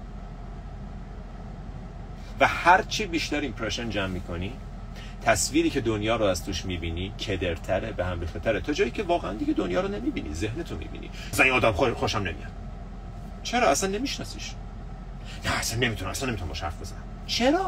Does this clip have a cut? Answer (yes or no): yes